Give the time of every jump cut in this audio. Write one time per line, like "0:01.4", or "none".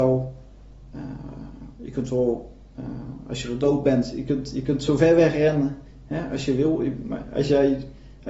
none